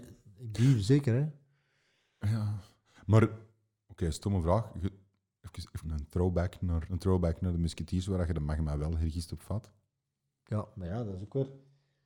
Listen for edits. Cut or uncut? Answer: cut